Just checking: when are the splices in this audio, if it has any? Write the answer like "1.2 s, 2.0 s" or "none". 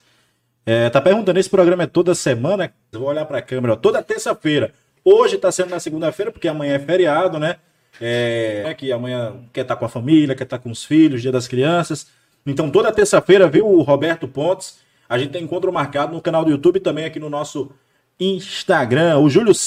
2.9 s, 8.6 s